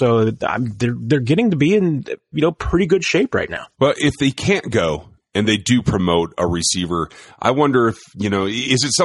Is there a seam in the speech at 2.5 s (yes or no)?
no